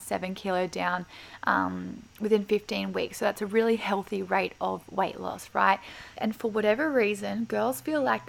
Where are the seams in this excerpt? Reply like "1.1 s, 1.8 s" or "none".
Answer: 6.2 s